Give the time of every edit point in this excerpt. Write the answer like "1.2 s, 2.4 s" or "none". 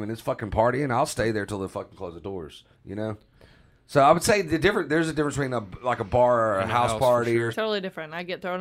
2.7 s, 7.5 s